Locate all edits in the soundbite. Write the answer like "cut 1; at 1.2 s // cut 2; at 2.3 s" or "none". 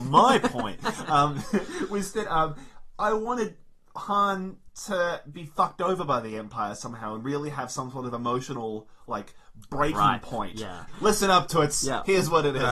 cut 1; at 10.9 s